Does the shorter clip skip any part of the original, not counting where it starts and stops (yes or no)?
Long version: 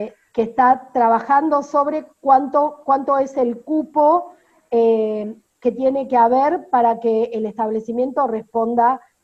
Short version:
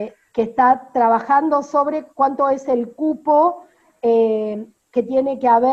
yes